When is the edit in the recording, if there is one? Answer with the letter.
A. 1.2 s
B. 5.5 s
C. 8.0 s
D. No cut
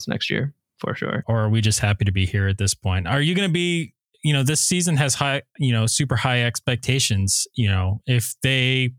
A